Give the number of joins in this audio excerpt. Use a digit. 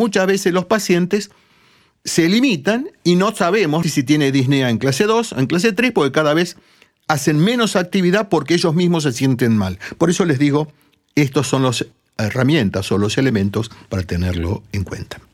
1